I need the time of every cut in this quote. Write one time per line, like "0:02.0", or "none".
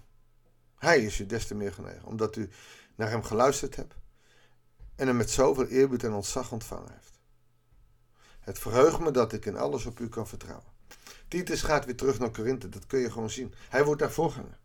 none